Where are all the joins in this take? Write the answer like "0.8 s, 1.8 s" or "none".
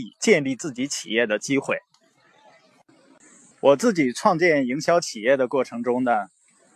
3.5 s